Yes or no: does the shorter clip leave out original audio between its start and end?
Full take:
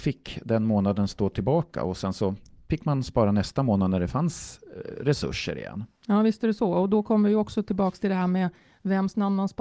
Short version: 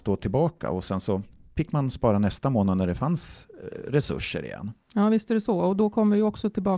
no